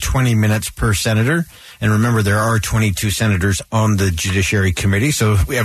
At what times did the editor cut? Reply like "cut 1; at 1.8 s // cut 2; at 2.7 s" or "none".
none